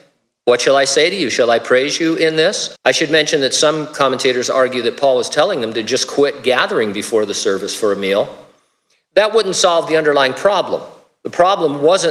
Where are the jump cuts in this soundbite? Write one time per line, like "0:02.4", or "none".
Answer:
0:02.8